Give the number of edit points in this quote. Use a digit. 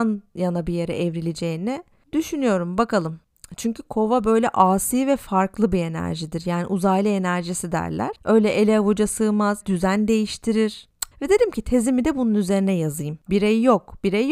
3